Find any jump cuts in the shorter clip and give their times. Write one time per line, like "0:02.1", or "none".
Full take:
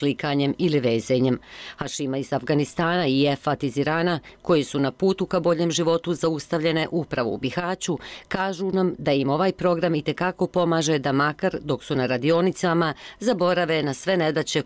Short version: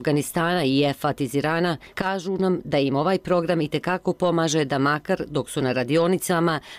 0:01.9